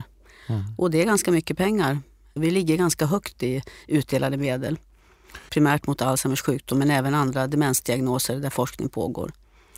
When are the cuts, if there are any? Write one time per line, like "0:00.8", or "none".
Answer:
0:02.4
0:05.5